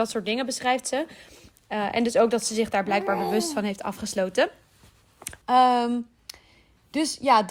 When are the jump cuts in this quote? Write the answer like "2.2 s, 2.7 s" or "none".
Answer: 5.4 s